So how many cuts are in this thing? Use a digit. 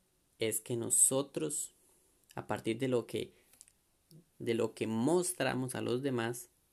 2